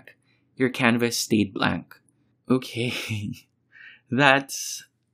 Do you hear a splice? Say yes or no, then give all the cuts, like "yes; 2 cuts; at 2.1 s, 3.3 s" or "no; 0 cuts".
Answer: yes; 1 cut; at 2.3 s